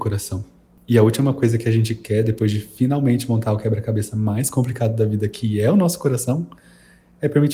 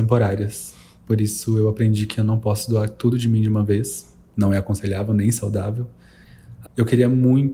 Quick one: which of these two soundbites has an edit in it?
second; 1 cut; at 6.6 s

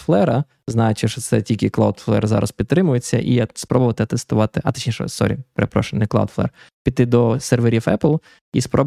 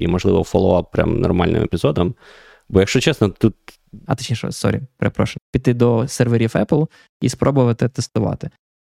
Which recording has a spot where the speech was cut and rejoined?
second; 2 cuts; at 4.1 s, 5.4 s

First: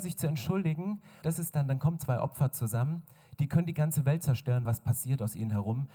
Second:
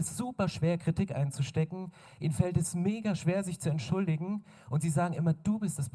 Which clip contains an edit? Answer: first; 2 cuts; at 1.2 s, 4.7 s

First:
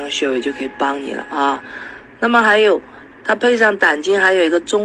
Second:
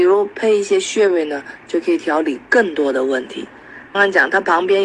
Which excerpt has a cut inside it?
second; 1 cut; at 3.9 s

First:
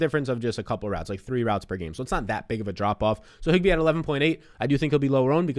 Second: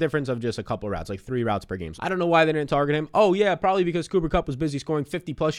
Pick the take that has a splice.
second; 1 cut; at 2.0 s

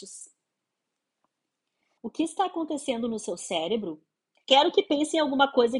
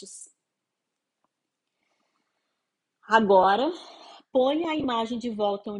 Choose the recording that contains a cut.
first; 2 cuts; at 2.0 s, 4.4 s

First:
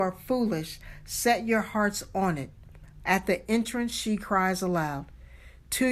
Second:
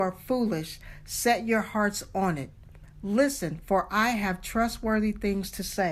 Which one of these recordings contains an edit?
first; 1 cut; at 3.0 s

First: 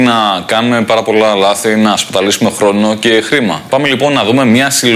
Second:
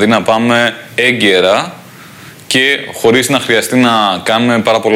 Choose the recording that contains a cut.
first; 1 cut; at 3.7 s

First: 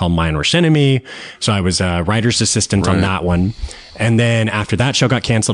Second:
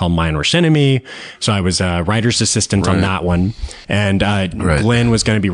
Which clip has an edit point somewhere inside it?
second; 1 cut; at 3.8 s

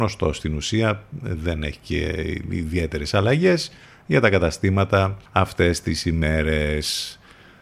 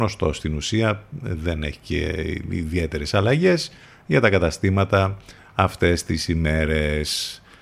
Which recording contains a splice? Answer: first; 1 cut; at 5.3 s

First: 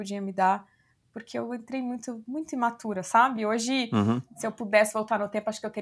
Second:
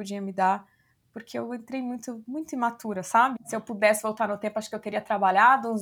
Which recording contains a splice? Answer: second; 1 cut; at 3.4 s

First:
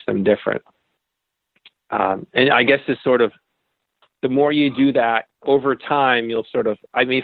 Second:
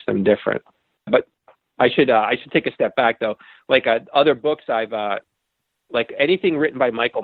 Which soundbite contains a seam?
second; 1 cut; at 1.1 s

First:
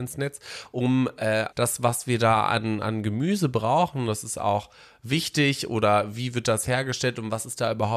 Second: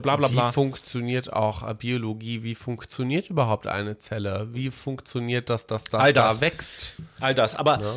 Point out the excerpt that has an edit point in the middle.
first; 1 cut; at 1.5 s

